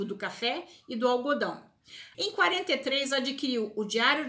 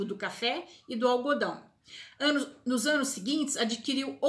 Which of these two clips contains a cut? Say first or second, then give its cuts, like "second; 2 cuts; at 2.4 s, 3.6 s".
first; 1 cut; at 2.1 s